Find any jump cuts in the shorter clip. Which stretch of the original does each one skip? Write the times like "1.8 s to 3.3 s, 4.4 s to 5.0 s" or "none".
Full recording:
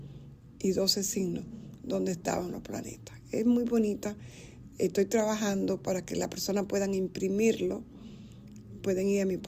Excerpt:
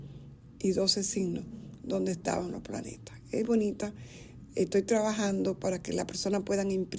3.4 s to 3.7 s